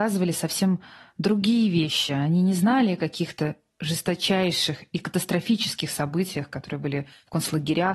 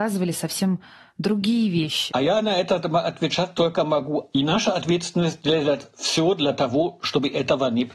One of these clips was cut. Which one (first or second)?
second